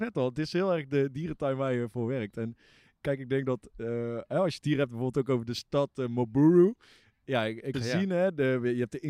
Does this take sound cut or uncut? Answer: cut